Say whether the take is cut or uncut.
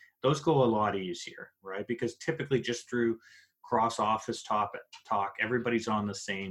uncut